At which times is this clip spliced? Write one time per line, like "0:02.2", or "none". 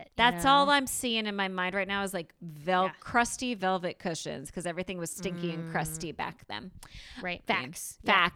0:07.5